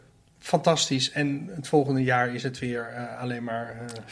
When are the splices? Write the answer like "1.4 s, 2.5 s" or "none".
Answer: none

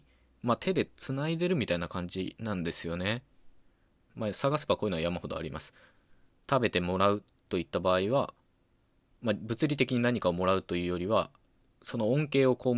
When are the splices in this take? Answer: 4.1 s

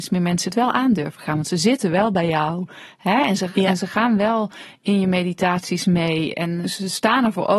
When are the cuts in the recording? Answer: none

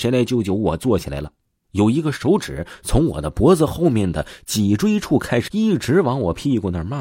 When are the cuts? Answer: 1.6 s, 5.5 s

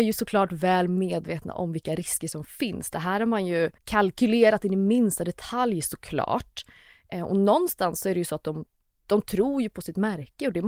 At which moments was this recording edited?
3.8 s

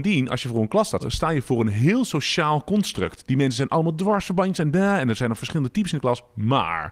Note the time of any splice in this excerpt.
1.0 s

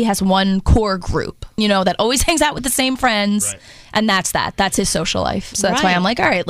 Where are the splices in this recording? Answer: 1.6 s, 5.5 s

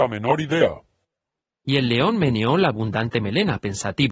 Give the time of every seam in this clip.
1.4 s

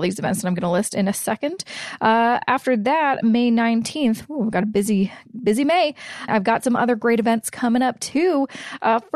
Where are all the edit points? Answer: 6.3 s

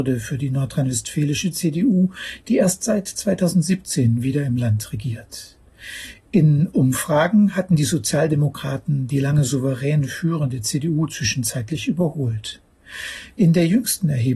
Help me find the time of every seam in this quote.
none

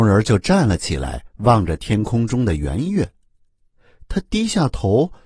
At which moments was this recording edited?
none

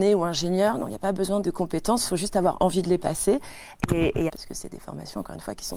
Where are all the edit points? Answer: 1.4 s, 4.3 s

